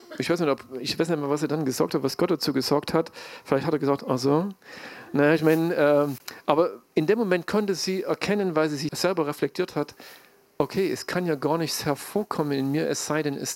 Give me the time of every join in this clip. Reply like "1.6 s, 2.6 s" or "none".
8.9 s